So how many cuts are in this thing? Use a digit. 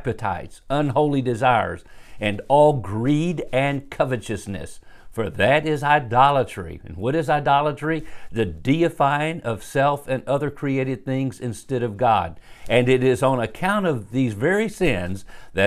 1